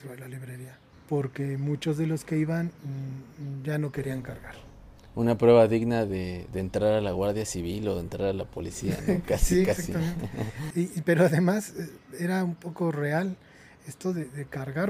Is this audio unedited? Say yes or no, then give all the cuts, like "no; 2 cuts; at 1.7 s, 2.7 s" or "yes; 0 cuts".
no; 1 cut; at 0.9 s